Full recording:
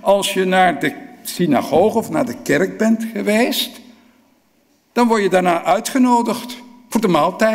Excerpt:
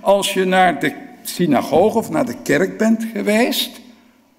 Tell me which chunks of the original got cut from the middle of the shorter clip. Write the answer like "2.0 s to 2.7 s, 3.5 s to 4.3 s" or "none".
none

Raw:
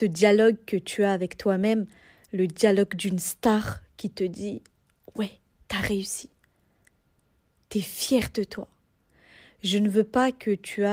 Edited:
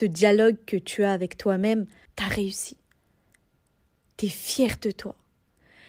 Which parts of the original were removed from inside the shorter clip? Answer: 2.1 s to 5.6 s

